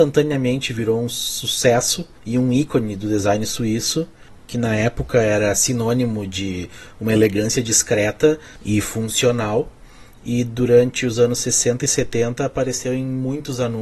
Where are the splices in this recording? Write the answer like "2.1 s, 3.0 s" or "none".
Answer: 2.2 s